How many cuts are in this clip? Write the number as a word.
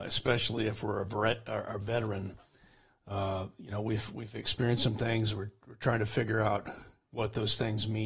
zero